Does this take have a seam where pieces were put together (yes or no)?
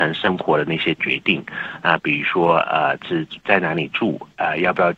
yes